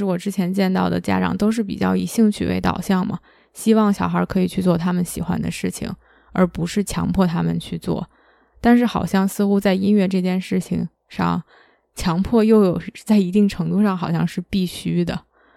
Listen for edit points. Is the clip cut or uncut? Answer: uncut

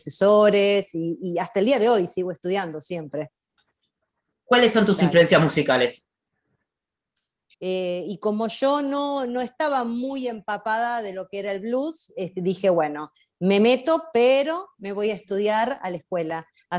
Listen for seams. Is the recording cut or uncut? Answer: cut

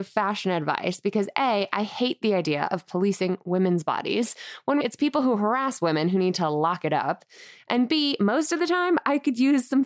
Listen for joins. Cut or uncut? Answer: cut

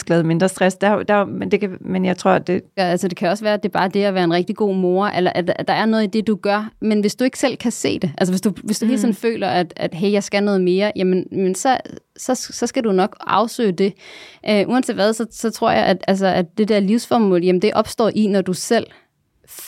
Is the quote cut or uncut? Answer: cut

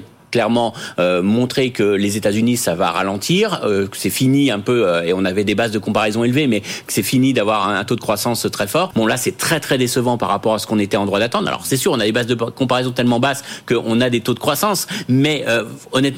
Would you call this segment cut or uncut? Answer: cut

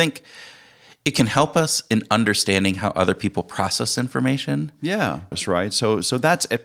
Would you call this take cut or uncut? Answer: cut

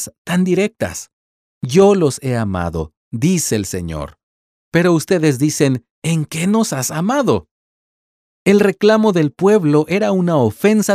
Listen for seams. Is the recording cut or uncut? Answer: uncut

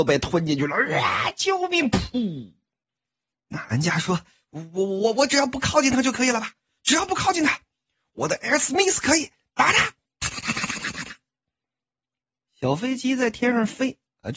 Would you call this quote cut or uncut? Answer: cut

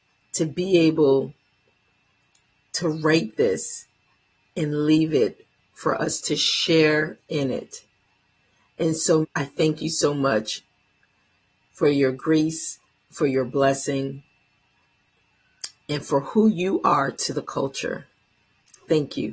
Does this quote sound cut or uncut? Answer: cut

